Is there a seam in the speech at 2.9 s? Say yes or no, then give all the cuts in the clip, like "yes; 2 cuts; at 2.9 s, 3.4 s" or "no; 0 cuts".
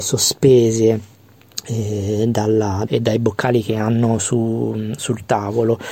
yes; 1 cut; at 2.9 s